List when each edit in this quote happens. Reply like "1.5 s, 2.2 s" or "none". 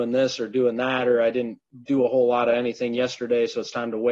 1.8 s